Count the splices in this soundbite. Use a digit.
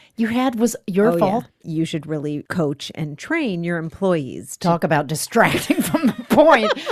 1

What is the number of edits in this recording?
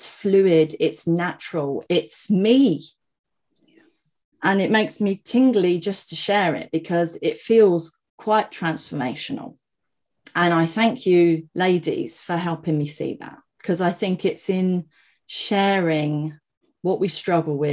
3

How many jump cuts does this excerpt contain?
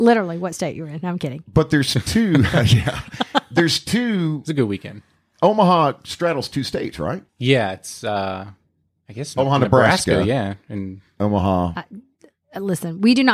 1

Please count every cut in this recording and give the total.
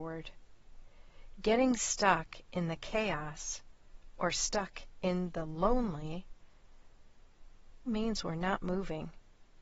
1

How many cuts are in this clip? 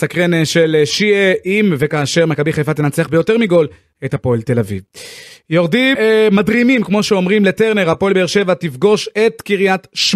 1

